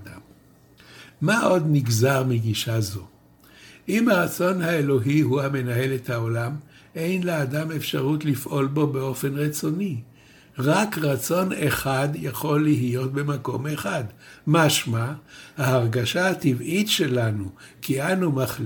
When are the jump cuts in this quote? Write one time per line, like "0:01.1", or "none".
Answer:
none